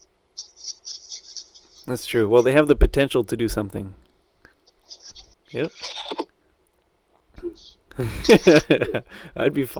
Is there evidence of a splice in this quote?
yes; 1 cut; at 5.3 s

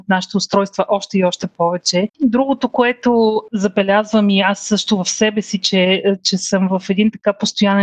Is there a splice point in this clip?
yes; 1 cut; at 2.1 s

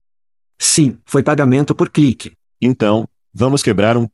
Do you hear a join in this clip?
yes; 2 cuts; at 1.0 s, 2.5 s

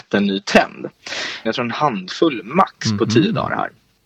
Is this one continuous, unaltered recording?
no; 1 cut; at 1.5 s

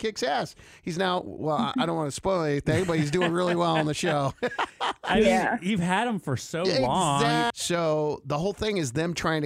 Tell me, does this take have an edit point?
yes; 1 cut; at 7.5 s

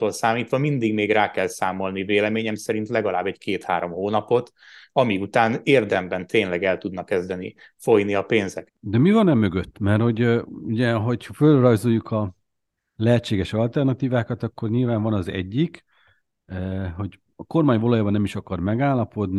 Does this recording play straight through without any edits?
no; 1 cut; at 8.7 s

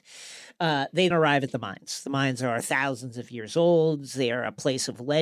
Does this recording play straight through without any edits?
no; 1 cut; at 1.1 s

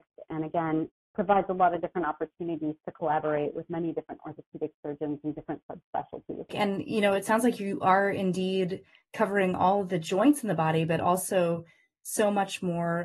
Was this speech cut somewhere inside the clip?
yes; 1 cut; at 6.5 s

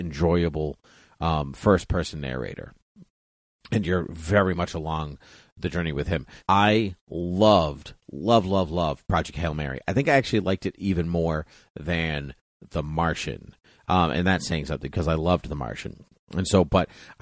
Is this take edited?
yes; 1 cut; at 6.4 s

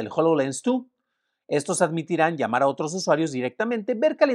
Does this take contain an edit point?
no; 0 cuts

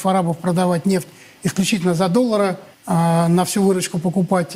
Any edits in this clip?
yes; 1 cut; at 2.7 s

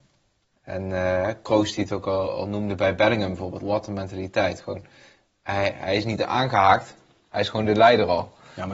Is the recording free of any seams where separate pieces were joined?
no; 1 cut; at 3.6 s

